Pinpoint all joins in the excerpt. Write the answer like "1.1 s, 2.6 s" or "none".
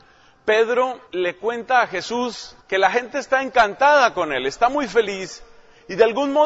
1.1 s, 2.6 s